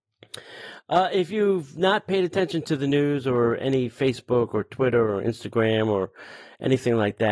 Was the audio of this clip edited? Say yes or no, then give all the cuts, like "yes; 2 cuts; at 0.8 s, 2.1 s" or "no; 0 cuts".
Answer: no; 0 cuts